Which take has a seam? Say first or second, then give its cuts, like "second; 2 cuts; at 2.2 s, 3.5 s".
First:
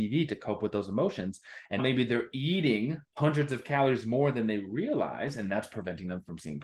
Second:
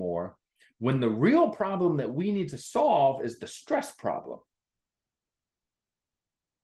first; 2 cuts; at 1.8 s, 3.1 s